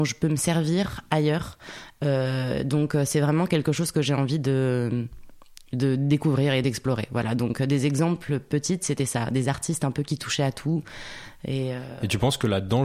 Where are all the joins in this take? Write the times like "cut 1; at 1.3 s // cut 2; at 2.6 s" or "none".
none